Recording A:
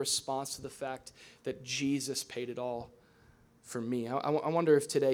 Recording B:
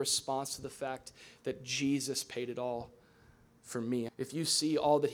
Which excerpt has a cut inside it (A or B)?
B